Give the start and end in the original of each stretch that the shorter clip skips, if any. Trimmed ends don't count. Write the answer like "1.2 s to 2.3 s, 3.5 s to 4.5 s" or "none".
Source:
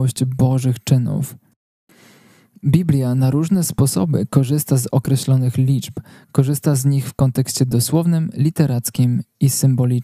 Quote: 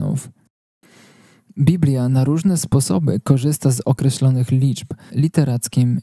6.2 s to 8.3 s